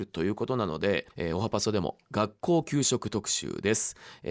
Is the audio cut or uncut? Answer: cut